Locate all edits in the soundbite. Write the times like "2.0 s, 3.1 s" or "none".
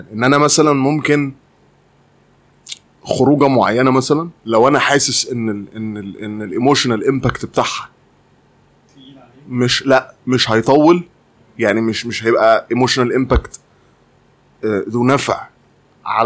4.4 s

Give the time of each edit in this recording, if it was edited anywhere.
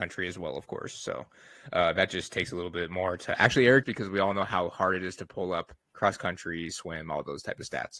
3.8 s, 5.8 s

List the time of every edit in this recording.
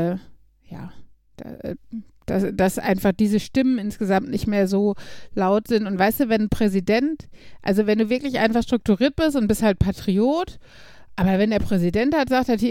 none

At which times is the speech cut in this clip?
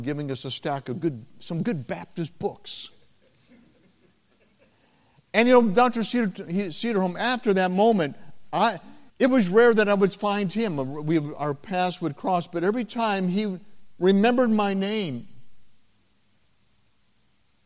9.1 s

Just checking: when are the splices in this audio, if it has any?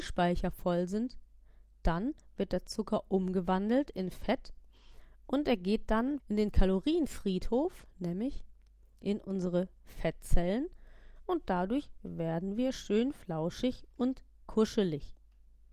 6.2 s

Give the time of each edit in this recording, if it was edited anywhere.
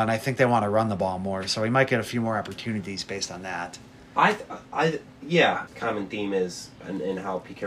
5.7 s

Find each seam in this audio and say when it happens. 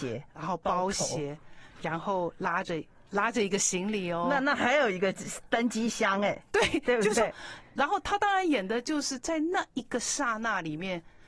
none

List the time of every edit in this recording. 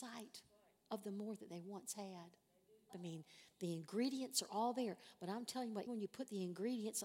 2.9 s, 5.9 s

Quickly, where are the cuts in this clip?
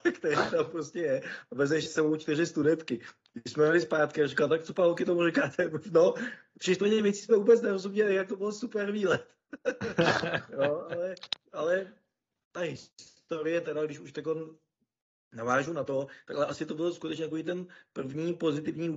none

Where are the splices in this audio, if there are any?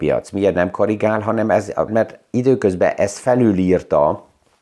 1.9 s

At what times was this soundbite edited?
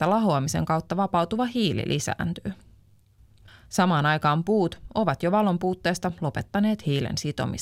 3.5 s

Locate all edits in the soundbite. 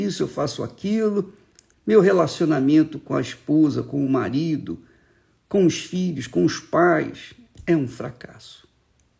1.7 s

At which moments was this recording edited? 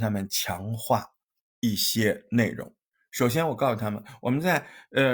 none

